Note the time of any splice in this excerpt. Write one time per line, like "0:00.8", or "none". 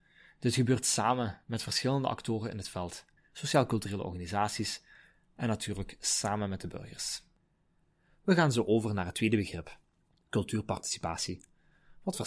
0:03.2